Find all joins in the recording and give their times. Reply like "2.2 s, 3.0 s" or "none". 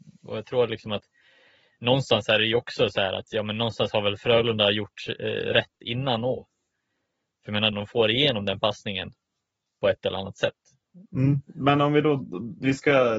7.7 s, 11.1 s